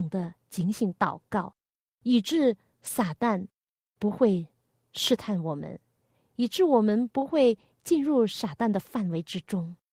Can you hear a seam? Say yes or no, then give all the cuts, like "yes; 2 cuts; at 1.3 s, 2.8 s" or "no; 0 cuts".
no; 0 cuts